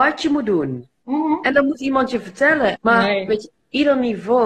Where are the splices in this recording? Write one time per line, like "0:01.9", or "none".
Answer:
0:00.9
0:02.8